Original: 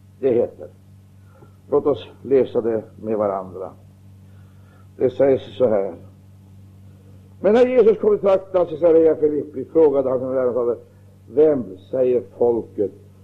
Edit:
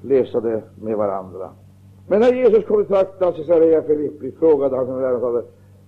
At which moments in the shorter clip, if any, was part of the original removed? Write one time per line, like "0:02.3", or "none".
0:01.9